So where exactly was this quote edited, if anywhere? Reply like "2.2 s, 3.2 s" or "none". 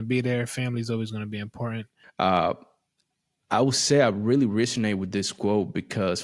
2.0 s